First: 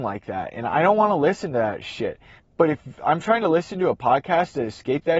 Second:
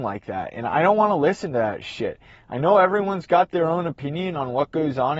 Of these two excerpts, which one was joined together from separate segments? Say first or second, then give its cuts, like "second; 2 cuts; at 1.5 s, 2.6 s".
first; 1 cut; at 2.4 s